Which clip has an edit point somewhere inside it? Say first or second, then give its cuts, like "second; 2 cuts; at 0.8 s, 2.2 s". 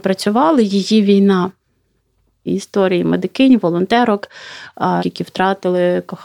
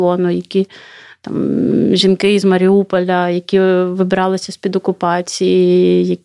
first; 2 cuts; at 2.5 s, 5.0 s